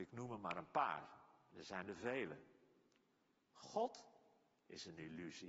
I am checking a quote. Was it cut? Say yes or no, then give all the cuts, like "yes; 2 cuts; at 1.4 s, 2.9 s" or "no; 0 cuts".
no; 0 cuts